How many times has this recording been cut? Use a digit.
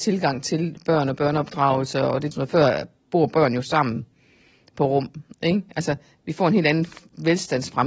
1